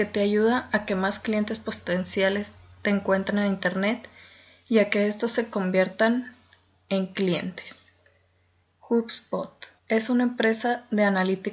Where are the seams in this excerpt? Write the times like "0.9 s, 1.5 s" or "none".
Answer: 8.6 s, 9.8 s

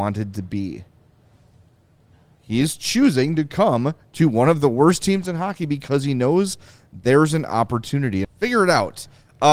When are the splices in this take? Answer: 8.2 s

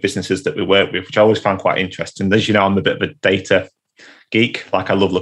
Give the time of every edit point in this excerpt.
none

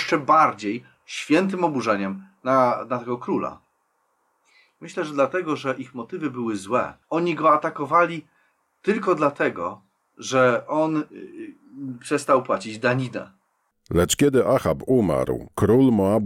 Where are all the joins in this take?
7.0 s

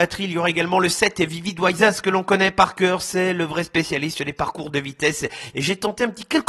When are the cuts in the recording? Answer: 5.5 s

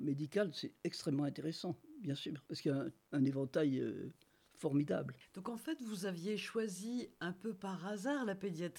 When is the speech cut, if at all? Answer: 2.5 s

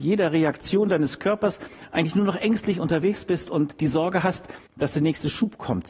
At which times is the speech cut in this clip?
4.7 s

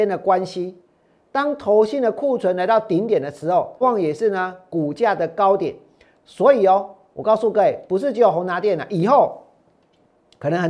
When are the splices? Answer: 3.8 s, 6.1 s

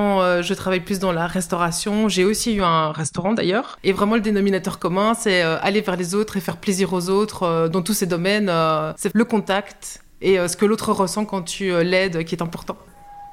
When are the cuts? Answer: 9.1 s

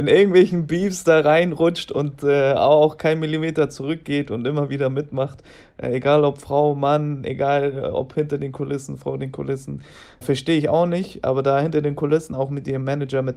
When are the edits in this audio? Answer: 10.2 s

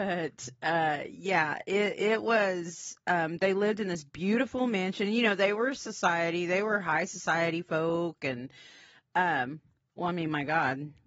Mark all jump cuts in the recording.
none

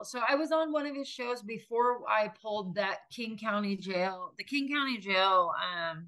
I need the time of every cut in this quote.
none

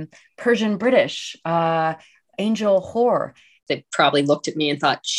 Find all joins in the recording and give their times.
3.6 s

